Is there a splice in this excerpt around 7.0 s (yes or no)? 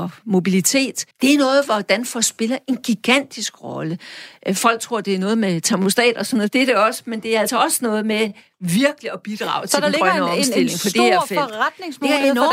no